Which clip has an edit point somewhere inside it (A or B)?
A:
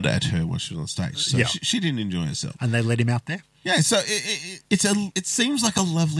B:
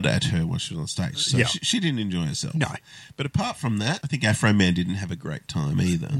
A